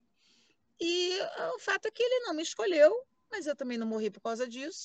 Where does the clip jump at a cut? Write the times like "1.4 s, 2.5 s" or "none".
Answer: none